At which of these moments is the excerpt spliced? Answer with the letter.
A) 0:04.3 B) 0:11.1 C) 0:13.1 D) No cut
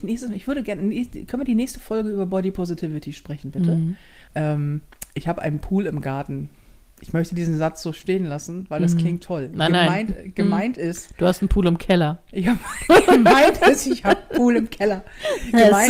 A